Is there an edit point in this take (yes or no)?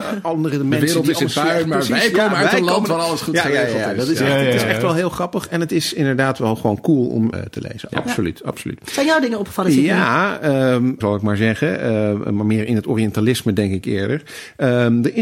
yes